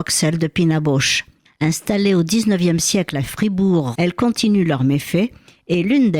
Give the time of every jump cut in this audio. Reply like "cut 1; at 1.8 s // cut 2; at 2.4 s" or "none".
cut 1; at 1.5 s // cut 2; at 3.9 s